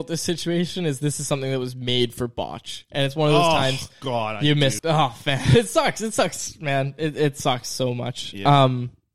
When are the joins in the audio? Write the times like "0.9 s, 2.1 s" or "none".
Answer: 4.8 s